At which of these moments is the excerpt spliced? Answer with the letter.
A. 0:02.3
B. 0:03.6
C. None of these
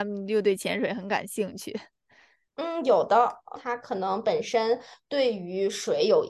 B